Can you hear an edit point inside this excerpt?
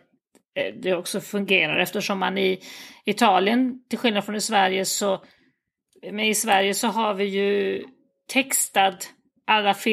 no; 0 cuts

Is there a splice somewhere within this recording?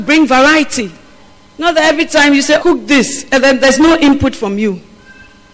yes; 1 cut; at 2.6 s

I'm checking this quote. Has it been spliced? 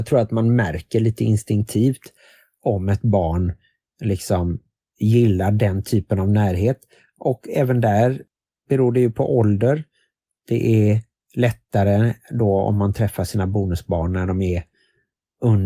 no; 0 cuts

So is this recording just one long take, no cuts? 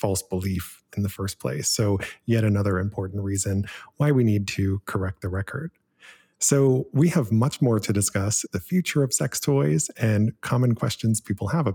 no; 1 cut; at 8.5 s

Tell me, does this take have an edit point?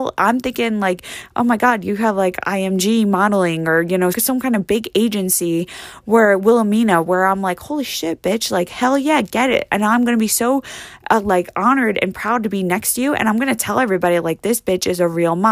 yes; 1 cut; at 4.1 s

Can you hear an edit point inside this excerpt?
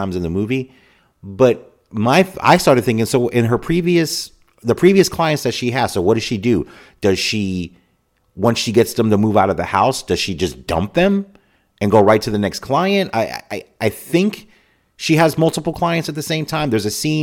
no; 0 cuts

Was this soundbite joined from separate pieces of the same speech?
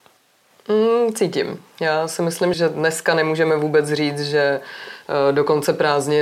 yes; 1 cut; at 2.5 s

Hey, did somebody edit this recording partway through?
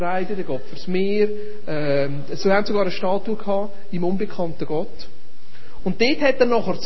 yes; 1 cut; at 5.8 s

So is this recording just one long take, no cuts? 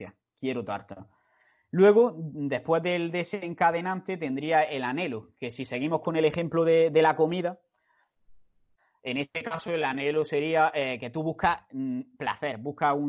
yes; 0 cuts

